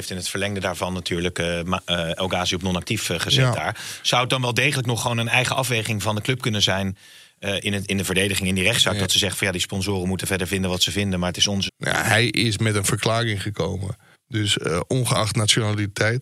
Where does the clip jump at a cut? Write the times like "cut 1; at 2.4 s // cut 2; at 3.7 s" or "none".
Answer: cut 1; at 11.7 s // cut 2; at 14.1 s